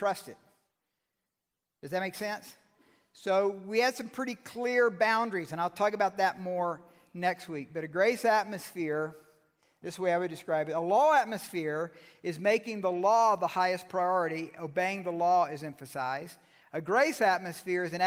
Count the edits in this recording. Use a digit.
0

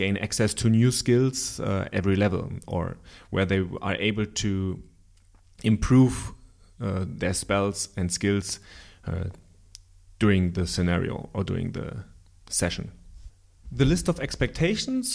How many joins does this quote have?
0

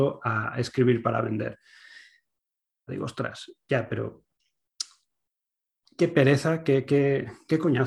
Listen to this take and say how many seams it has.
1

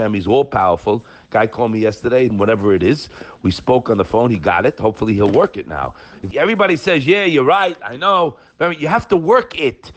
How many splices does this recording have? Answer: 2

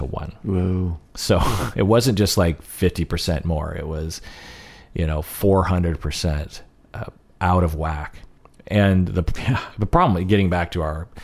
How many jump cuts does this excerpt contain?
1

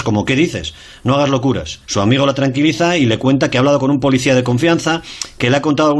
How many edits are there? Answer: 1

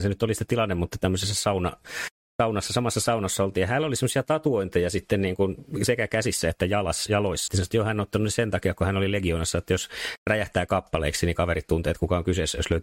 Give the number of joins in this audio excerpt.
1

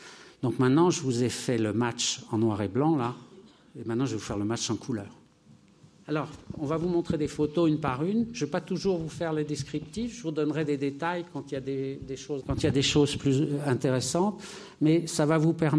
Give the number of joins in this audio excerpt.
2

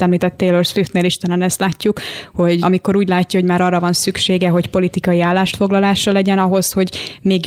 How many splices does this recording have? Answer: 1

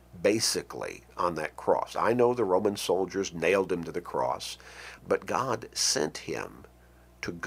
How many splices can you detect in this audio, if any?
1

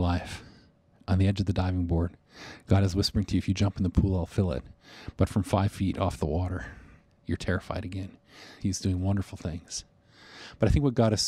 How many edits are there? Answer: 1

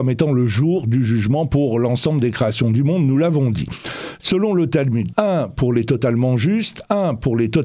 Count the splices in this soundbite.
1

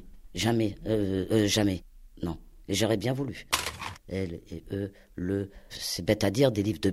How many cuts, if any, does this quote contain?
2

